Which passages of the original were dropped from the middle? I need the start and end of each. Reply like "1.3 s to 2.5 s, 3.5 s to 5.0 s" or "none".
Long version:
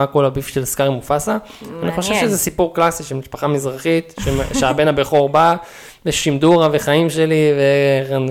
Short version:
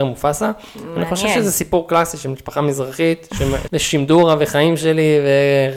4.5 s to 6.0 s